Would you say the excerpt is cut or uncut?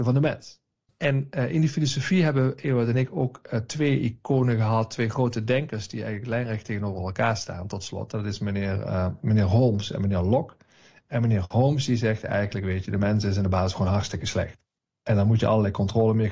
uncut